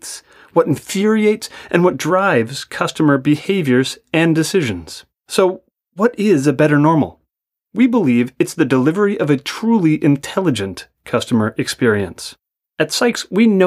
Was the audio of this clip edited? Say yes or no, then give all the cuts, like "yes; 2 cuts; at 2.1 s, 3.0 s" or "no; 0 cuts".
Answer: yes; 1 cut; at 12.6 s